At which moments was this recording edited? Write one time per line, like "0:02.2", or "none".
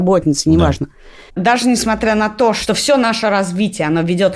0:01.3